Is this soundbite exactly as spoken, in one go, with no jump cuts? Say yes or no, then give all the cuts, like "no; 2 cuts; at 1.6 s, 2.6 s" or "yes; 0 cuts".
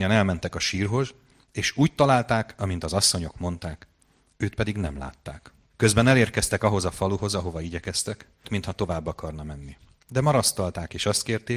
no; 2 cuts; at 5.7 s, 8.4 s